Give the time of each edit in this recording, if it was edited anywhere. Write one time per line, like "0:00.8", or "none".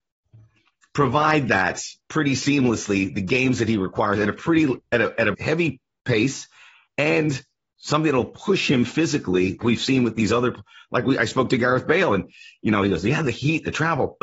0:05.3
0:09.6